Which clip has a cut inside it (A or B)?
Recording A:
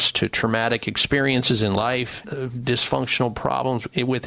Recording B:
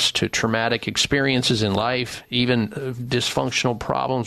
A